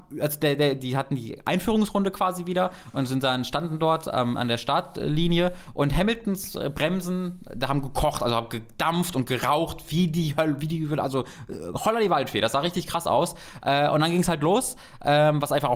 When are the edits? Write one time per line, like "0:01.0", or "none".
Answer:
none

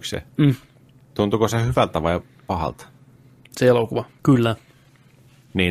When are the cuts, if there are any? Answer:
0:04.2

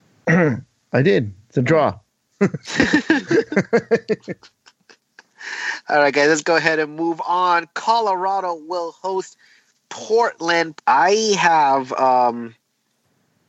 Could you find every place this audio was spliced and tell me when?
0:10.8

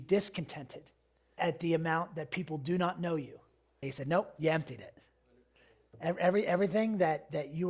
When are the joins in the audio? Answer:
0:01.4
0:03.8

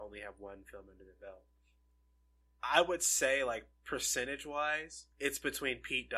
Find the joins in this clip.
0:05.1

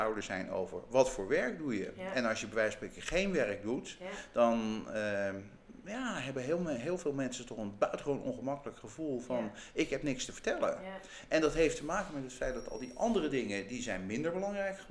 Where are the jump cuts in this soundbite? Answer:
none

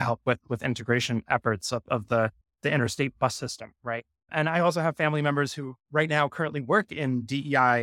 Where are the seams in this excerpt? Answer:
0:02.4

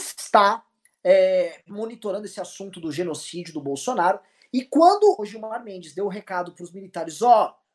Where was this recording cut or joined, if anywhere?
0:05.2

